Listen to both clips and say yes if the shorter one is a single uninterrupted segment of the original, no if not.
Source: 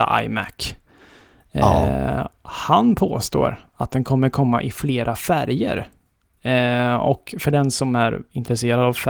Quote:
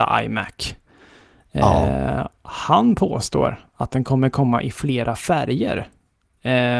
yes